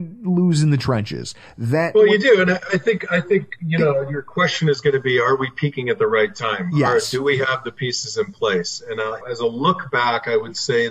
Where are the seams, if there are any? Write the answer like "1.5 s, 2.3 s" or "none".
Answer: 9.2 s